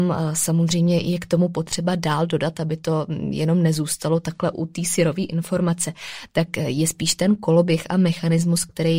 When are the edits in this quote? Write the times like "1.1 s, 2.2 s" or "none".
4.5 s